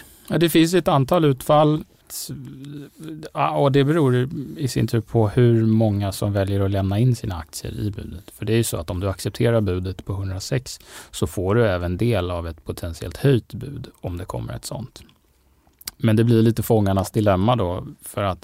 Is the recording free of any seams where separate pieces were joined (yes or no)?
yes